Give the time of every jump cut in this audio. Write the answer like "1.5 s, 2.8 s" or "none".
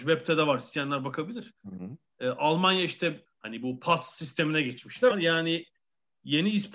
5.1 s

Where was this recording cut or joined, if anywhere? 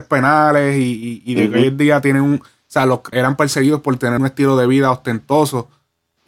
3.1 s, 4.2 s

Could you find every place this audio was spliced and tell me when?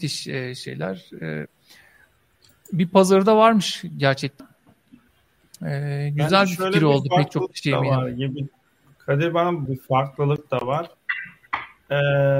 9.7 s

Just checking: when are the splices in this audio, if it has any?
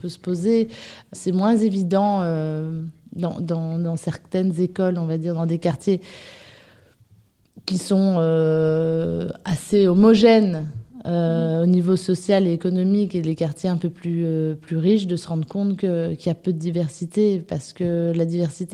1.1 s

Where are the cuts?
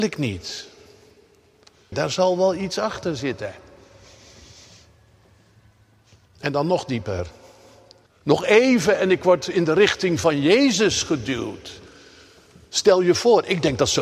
1.9 s, 8.1 s

